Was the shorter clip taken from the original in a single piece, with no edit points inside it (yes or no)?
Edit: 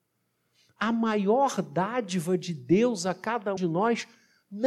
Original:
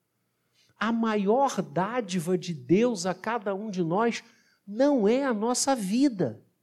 no